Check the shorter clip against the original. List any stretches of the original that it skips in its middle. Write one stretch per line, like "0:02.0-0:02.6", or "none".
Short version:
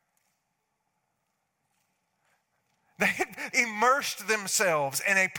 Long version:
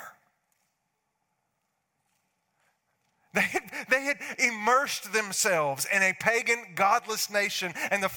0:03.8-0:04.3

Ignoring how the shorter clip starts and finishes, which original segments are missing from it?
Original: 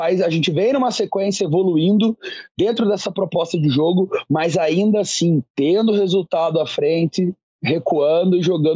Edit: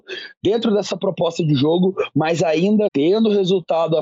0:05.0-0:05.5

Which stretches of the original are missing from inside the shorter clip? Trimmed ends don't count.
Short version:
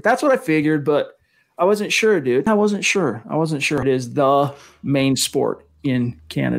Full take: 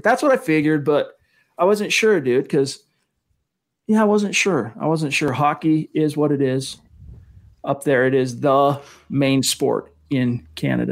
0:02.5-0:04.0
0:05.3-0:08.1

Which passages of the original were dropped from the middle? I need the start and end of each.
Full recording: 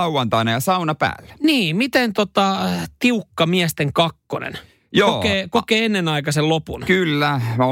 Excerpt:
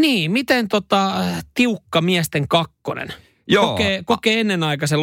none

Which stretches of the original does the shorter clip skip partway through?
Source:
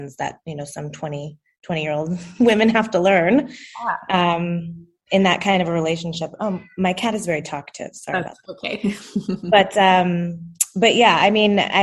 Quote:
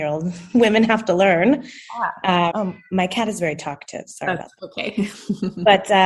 0:04.4-0:06.4

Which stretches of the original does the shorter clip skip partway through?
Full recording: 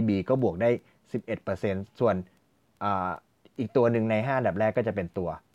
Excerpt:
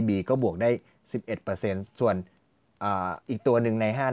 0:03.2-0:03.5

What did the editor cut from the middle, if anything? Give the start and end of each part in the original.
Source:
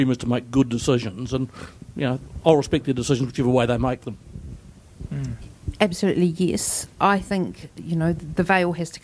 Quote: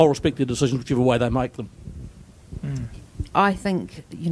0:05.8-0:06.9

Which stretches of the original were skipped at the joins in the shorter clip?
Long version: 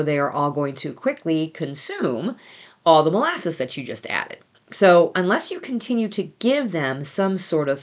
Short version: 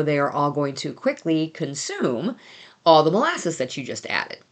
none

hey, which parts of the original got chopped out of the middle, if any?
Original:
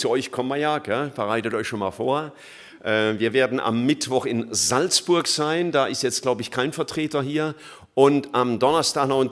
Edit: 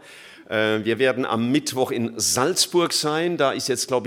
none

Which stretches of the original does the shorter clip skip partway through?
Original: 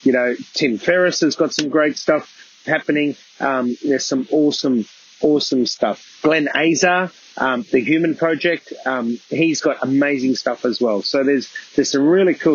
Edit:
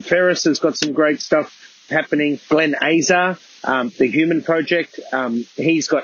0:03.2-0:06.2

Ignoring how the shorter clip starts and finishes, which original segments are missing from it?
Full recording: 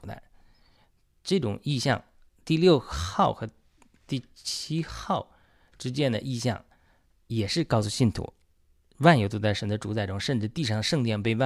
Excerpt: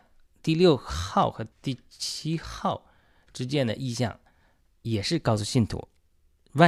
0:03.5-0:04.0

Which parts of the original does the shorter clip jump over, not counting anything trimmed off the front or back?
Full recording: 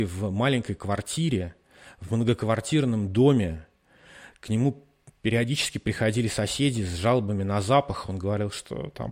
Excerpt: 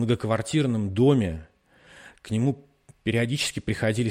none

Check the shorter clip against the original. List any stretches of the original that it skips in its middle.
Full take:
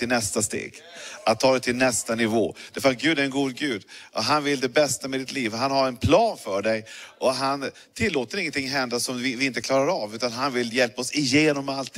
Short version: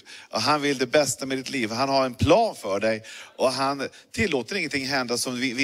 none

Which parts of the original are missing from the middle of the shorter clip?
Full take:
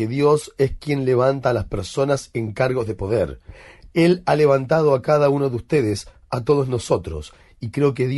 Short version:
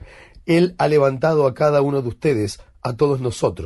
none

